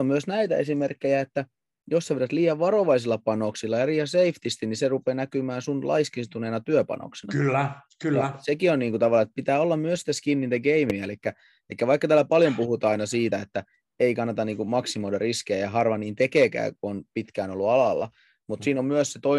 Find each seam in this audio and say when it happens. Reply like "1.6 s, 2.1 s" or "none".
none